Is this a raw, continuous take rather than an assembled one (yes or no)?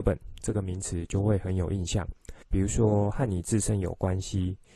no